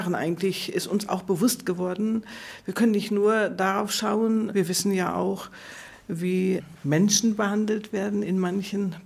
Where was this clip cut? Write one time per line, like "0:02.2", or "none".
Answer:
0:04.5